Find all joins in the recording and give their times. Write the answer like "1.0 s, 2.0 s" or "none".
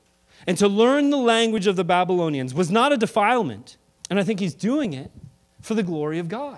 4.0 s